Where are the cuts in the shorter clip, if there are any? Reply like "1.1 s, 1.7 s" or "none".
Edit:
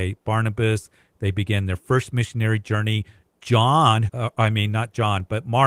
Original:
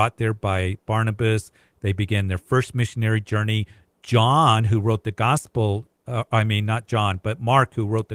4.1 s